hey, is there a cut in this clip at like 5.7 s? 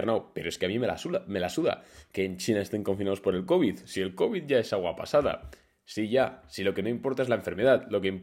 no; 0 cuts

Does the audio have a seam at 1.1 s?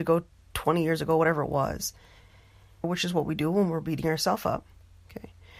no; 1 cut; at 2.8 s

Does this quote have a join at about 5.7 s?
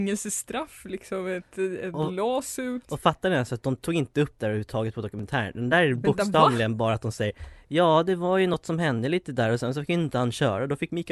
no; 0 cuts

